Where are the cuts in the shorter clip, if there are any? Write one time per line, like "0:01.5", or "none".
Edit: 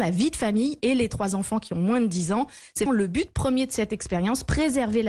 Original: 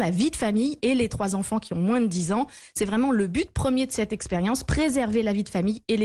0:02.9